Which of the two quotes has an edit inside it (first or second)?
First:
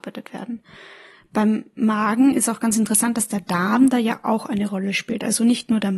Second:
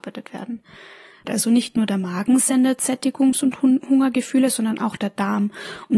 second